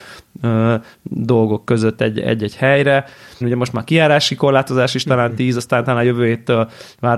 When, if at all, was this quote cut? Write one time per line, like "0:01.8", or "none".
0:03.4